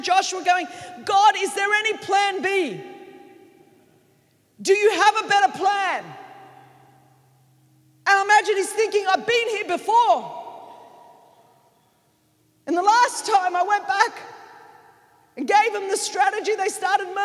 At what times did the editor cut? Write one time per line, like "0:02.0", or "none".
none